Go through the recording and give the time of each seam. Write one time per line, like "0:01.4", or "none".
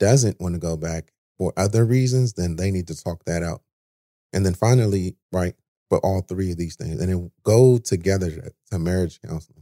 0:05.2